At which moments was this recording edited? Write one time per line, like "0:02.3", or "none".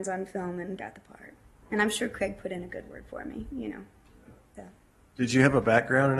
0:04.5